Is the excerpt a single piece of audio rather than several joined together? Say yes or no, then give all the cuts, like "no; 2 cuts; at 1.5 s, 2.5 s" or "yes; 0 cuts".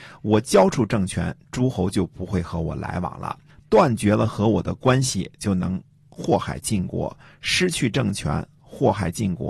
yes; 0 cuts